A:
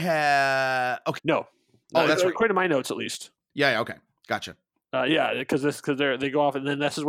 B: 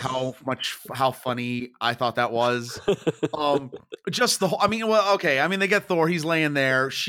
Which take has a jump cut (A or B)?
A